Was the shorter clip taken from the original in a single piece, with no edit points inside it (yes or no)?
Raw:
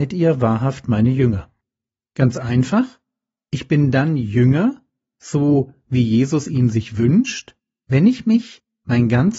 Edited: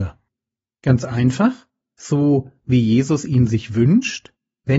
no